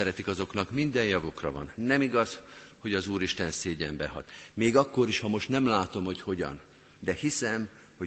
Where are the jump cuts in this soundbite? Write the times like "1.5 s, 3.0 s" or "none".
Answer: 1.8 s, 7.0 s